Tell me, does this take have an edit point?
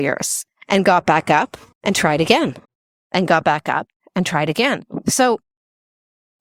no; 0 cuts

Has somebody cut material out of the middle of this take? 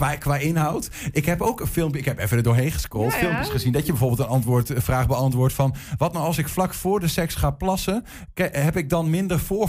no; 0 cuts

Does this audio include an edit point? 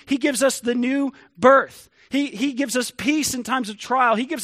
no; 0 cuts

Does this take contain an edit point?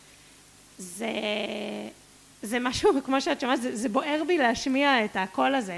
no; 0 cuts

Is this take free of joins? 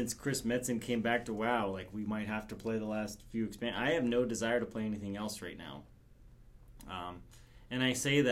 yes; 0 cuts

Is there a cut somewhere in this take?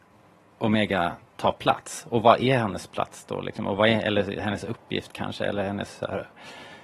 no; 0 cuts

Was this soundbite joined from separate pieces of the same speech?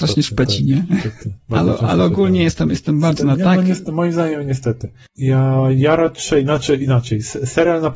no; 0 cuts

